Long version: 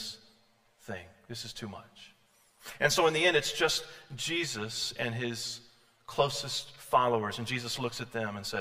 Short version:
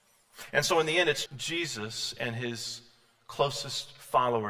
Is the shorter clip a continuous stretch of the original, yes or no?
no